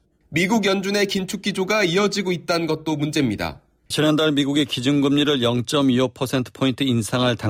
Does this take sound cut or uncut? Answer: cut